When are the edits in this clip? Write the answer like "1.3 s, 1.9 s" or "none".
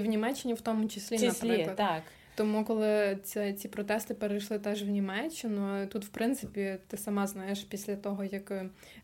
none